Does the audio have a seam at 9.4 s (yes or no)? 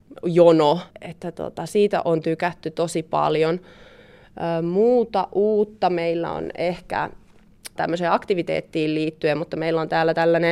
no